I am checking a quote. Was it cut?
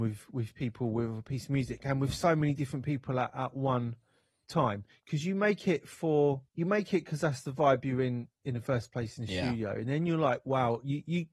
yes; 1 cut; at 6.5 s

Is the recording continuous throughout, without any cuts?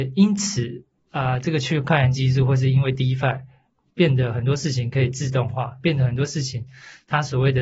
yes; 0 cuts

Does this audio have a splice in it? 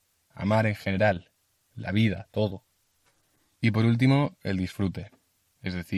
no; 0 cuts

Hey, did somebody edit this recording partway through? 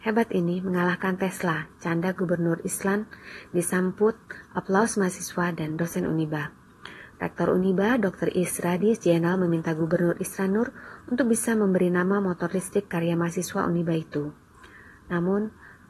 yes; 1 cut; at 7.1 s

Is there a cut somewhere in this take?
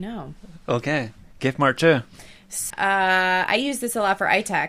yes; 1 cut; at 2.7 s

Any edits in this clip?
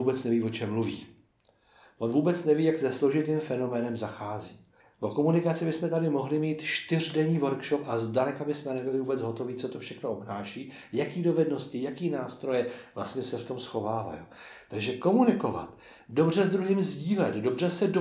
no; 0 cuts

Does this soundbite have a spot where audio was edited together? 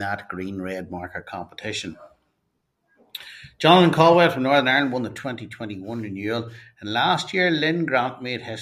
no; 0 cuts

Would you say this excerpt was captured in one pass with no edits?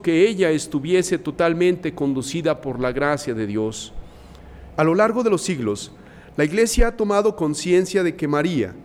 no; 1 cut; at 4.7 s

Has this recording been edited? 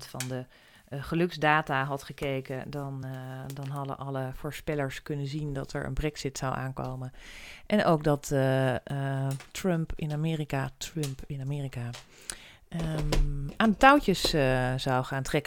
no; 0 cuts

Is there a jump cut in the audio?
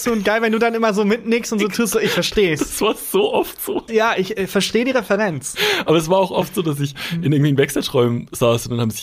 yes; 1 cut; at 3.9 s

